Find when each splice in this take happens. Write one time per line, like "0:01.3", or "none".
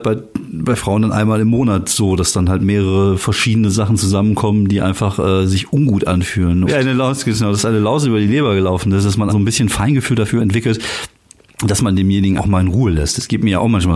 0:06.7
0:09.3
0:12.4